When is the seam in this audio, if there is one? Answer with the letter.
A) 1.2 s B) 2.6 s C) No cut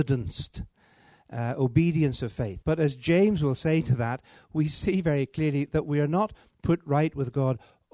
B